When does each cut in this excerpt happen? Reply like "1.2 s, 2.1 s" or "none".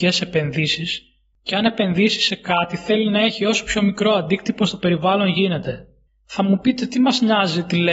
6.1 s